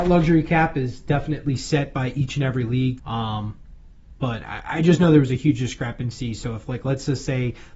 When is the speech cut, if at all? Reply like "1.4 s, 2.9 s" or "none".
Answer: 3.0 s

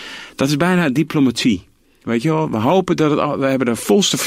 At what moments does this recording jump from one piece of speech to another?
none

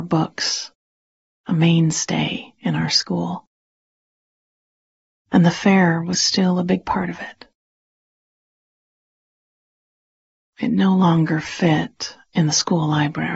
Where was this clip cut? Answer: none

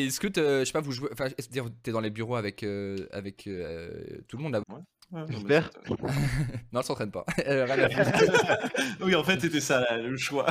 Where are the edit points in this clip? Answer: 4.6 s

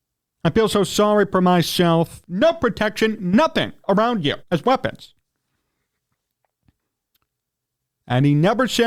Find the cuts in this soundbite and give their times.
2.2 s, 4.4 s

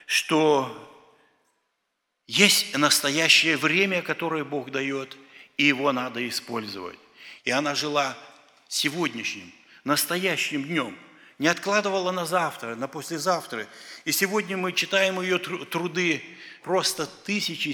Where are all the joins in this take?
7.4 s, 16.6 s

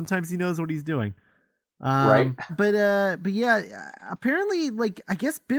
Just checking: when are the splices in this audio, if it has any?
2.5 s

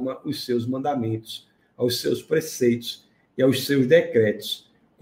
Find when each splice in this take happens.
none

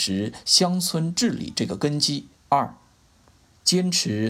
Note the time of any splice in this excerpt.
2.4 s

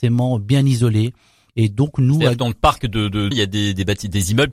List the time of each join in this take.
3.3 s

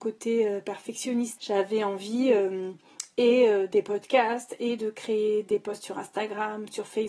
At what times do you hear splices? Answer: 1.4 s, 3.7 s

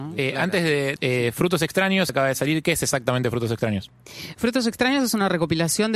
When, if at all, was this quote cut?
1.0 s, 2.1 s

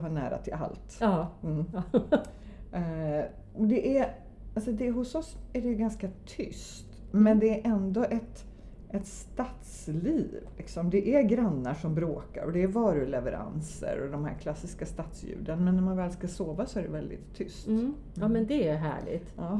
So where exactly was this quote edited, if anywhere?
none

